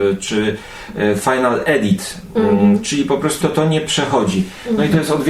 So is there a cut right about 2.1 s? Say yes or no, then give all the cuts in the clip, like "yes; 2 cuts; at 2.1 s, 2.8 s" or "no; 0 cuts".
no; 1 cut; at 3.4 s